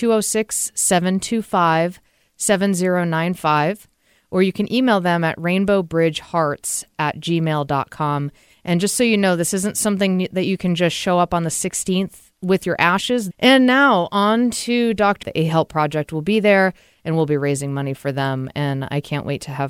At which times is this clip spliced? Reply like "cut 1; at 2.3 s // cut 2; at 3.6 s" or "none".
cut 1; at 13.3 s // cut 2; at 15.2 s

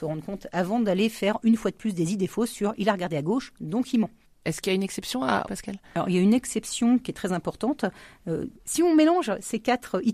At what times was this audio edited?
cut 1; at 5.4 s

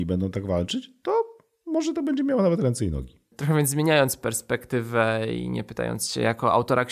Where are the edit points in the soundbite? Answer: cut 1; at 3.3 s

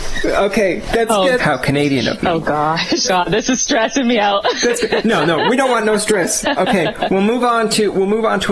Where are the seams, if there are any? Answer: cut 1; at 1.4 s // cut 2; at 3.0 s // cut 3; at 6.4 s

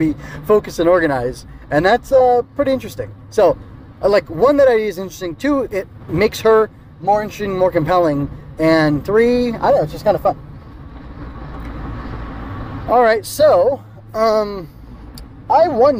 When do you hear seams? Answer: none

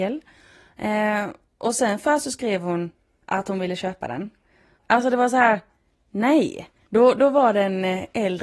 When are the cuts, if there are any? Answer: cut 1; at 4.7 s // cut 2; at 6.8 s

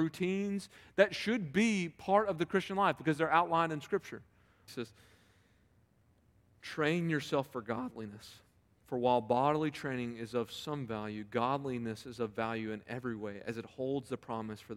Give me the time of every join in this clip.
cut 1; at 4.7 s

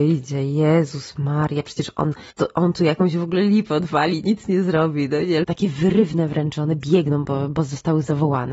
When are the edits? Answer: cut 1; at 2.3 s // cut 2; at 5.4 s

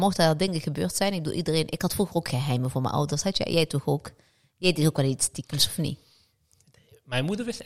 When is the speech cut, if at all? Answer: none

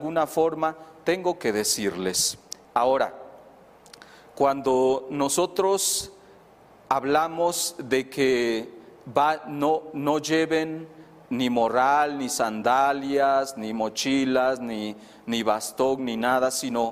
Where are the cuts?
cut 1; at 2.6 s

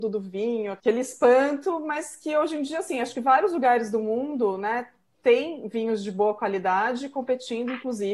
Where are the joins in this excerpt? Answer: none

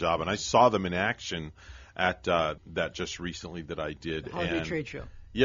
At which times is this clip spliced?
cut 1; at 2.6 s

